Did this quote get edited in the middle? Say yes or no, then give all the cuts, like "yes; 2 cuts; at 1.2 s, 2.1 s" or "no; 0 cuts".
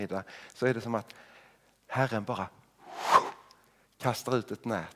no; 0 cuts